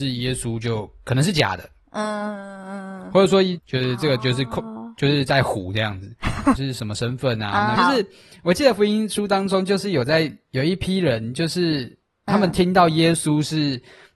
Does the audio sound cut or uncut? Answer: cut